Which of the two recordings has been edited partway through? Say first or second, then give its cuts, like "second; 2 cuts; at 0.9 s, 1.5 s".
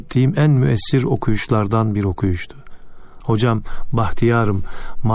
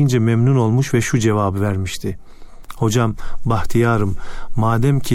first; 1 cut; at 3.2 s